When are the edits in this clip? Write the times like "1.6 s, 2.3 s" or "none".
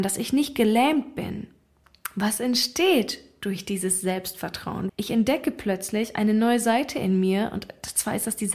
4.9 s